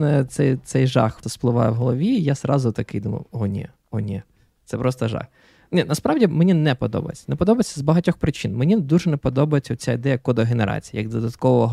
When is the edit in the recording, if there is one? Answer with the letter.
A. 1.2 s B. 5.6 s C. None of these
A